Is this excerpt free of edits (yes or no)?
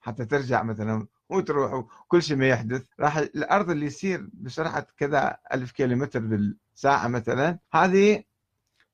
no